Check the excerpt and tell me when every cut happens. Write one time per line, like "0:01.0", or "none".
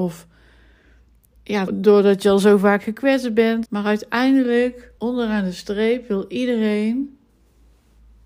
0:01.7
0:03.6
0:05.0